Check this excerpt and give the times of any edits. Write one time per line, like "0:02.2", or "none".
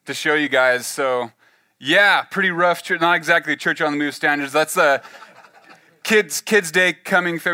none